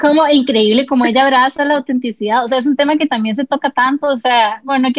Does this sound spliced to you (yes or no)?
no